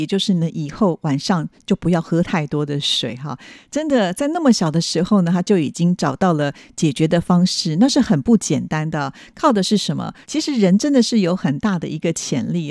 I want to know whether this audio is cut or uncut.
cut